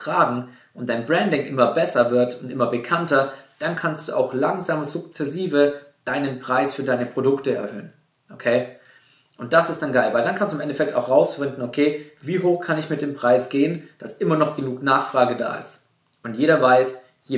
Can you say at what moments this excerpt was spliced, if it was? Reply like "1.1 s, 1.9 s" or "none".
none